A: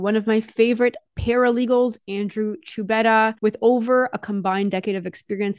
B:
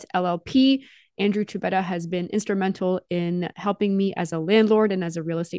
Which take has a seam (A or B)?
A